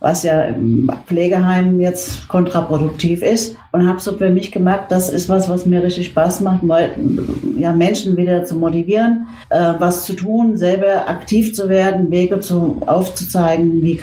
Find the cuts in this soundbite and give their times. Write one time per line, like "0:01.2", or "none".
none